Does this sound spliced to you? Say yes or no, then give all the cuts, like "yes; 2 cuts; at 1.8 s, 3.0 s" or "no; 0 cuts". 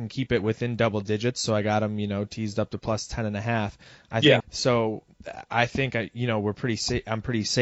yes; 1 cut; at 4.4 s